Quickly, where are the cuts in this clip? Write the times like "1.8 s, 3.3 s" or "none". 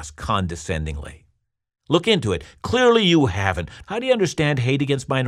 3.8 s